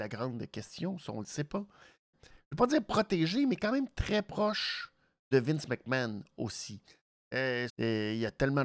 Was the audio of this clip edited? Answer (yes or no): yes